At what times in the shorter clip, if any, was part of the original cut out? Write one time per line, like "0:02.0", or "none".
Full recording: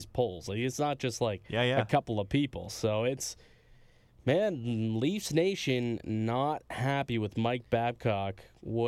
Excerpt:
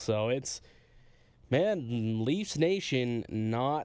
none